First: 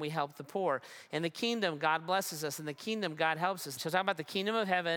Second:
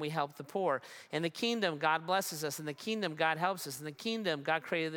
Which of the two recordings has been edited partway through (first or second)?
first